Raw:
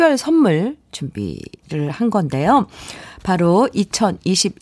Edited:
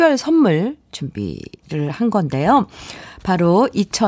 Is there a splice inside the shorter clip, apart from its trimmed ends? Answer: no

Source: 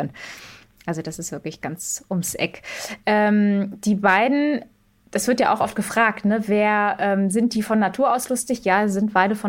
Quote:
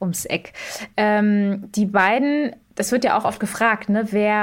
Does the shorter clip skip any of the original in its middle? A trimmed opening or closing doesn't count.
yes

